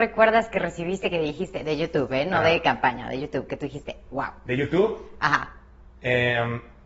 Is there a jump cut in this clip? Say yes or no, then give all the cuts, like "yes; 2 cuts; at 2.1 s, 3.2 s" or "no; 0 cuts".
yes; 1 cut; at 6.0 s